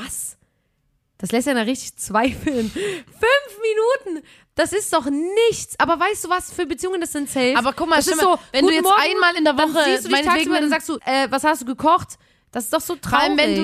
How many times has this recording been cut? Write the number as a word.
two